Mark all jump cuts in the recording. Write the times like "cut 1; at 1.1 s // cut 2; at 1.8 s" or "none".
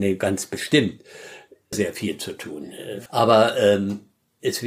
cut 1; at 1.7 s // cut 2; at 3.1 s